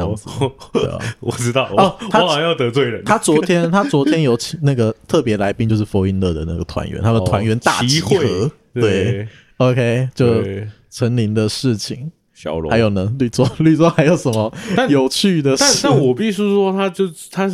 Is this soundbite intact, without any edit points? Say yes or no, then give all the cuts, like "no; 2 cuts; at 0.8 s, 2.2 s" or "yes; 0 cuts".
yes; 0 cuts